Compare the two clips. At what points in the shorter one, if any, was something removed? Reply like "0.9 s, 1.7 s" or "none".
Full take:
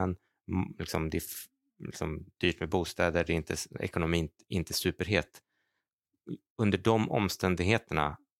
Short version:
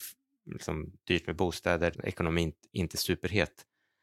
1.9 s